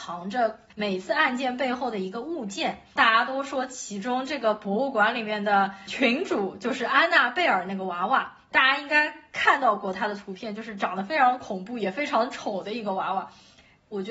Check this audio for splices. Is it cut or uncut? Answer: uncut